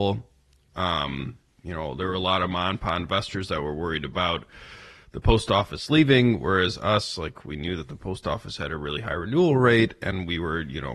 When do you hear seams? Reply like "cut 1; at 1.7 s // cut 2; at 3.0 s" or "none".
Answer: none